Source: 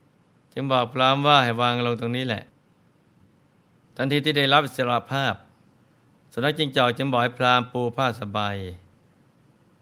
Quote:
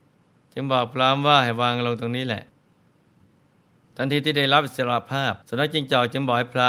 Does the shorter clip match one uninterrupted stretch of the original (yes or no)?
no